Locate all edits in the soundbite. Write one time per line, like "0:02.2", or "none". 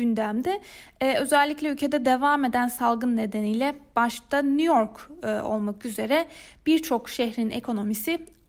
none